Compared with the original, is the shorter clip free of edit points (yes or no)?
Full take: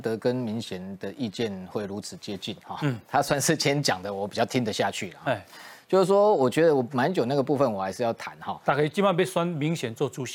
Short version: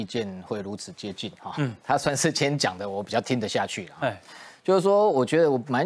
yes